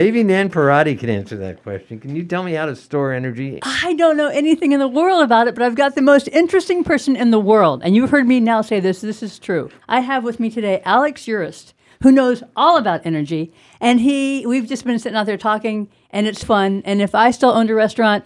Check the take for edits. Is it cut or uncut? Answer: cut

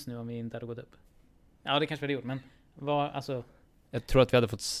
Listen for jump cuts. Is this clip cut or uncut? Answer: uncut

